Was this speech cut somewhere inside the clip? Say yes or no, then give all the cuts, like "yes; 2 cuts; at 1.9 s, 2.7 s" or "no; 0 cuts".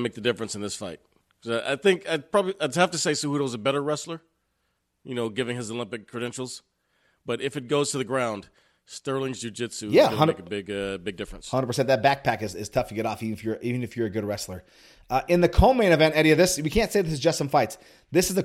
no; 0 cuts